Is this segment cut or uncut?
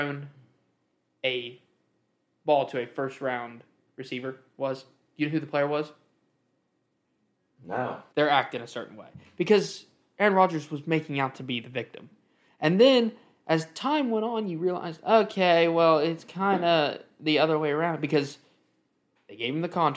cut